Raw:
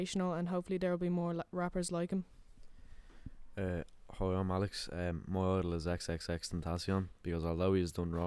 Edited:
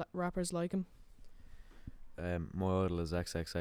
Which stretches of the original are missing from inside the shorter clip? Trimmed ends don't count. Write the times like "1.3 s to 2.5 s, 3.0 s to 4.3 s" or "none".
3.6 s to 4.9 s